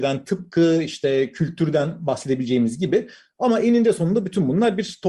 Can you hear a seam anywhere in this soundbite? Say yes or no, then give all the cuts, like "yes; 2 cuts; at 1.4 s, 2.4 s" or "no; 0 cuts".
no; 0 cuts